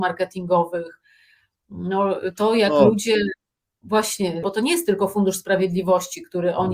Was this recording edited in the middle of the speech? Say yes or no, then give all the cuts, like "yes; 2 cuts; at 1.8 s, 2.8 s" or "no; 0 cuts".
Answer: yes; 1 cut; at 4.4 s